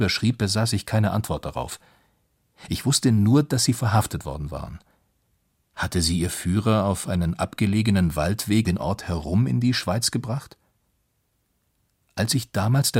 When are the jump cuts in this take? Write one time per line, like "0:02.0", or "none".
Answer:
0:05.7
0:08.6